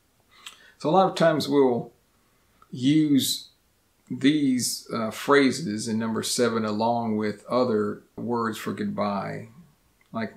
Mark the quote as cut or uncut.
cut